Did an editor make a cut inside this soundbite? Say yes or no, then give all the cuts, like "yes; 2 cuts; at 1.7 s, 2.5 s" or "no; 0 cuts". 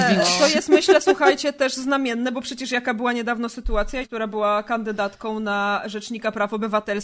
yes; 1 cut; at 4.0 s